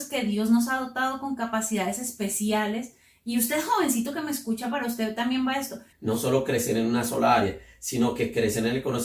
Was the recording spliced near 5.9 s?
yes; 1 cut; at 5.9 s

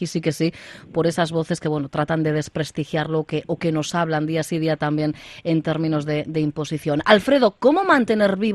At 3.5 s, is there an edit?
no; 0 cuts

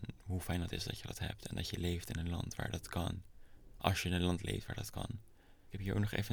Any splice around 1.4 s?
no; 0 cuts

